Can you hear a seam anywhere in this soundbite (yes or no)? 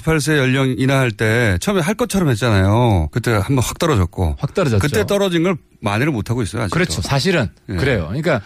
yes